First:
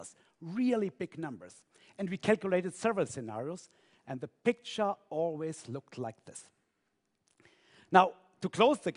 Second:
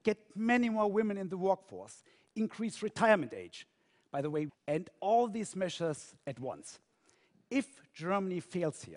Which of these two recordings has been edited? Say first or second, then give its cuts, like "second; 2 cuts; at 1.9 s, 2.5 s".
second; 1 cut; at 4.5 s